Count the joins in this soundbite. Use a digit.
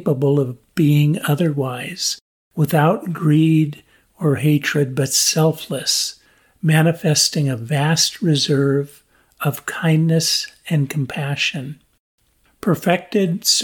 0